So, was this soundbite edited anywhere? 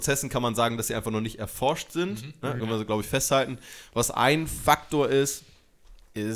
yes; 1 cut; at 2.6 s

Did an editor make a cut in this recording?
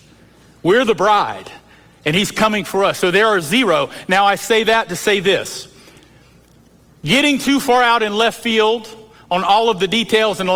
no; 0 cuts

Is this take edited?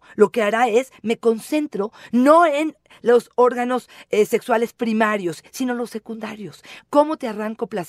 no; 0 cuts

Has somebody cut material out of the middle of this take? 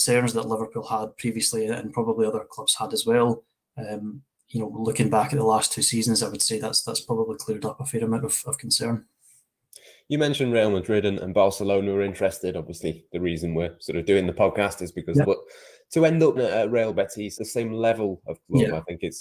yes; 3 cuts; at 15.2 s, 16.4 s, 17.4 s

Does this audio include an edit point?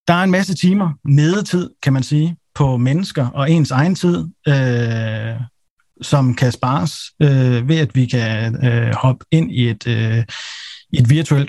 no; 0 cuts

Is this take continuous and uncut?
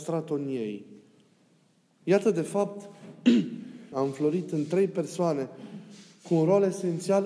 no; 2 cuts; at 2.0 s, 3.9 s

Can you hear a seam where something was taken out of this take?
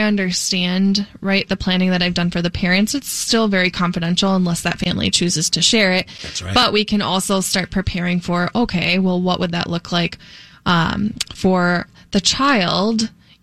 no; 0 cuts

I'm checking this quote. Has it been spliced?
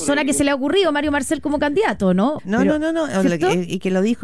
yes; 1 cut; at 2.4 s

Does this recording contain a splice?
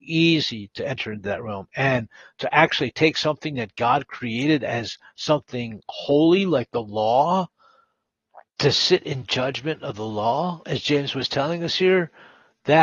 yes; 1 cut; at 8.5 s

